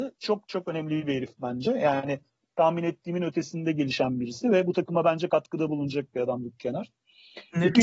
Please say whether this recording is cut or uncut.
uncut